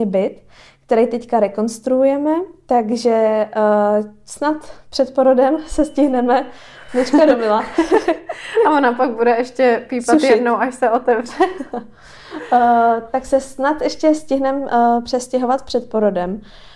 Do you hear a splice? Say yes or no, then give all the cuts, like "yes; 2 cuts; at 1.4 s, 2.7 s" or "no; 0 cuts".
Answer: yes; 1 cut; at 6.9 s